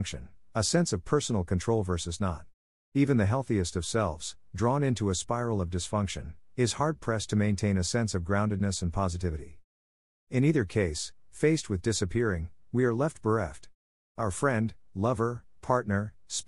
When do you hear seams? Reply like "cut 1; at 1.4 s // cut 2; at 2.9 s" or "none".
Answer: none